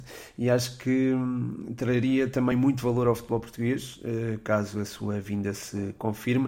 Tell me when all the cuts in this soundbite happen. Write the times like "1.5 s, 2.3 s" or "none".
none